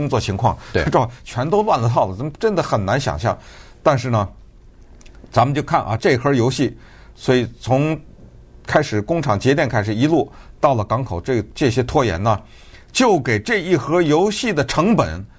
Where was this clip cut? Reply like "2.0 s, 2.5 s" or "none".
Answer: 6.0 s